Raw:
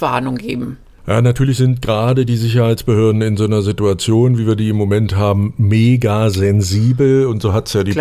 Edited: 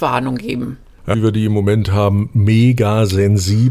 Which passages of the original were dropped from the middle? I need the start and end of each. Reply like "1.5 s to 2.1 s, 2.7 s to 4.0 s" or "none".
1.1 s to 4.4 s